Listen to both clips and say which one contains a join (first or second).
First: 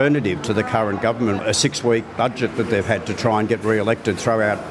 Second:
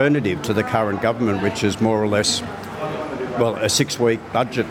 first